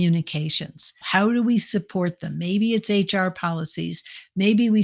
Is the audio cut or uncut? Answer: cut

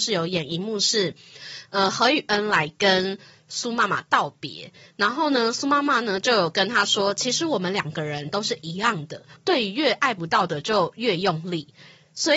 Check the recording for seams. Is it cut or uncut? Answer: cut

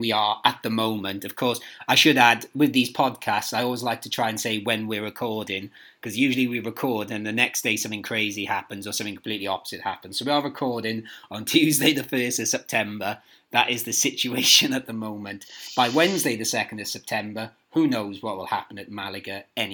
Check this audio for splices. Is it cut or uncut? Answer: uncut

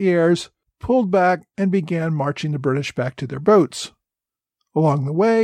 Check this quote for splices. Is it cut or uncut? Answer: uncut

